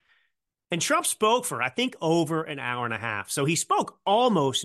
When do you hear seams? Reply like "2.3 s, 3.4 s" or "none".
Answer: none